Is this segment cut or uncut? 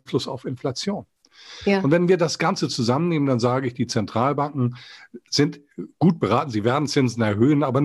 uncut